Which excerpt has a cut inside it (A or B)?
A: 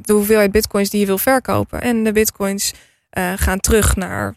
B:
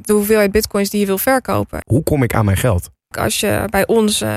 B